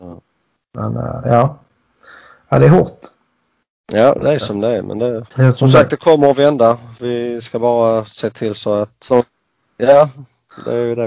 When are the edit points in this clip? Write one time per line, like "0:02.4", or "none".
0:05.3
0:09.1